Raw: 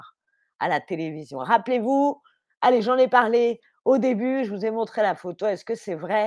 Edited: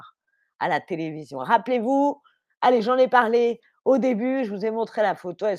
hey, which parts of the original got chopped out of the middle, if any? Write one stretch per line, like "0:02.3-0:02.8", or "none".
none